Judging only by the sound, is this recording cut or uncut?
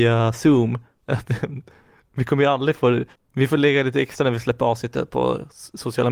cut